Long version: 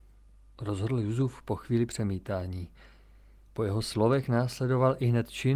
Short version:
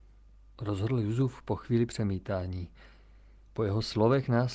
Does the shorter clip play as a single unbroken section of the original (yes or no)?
yes